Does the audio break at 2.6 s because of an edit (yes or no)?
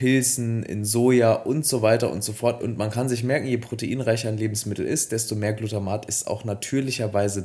yes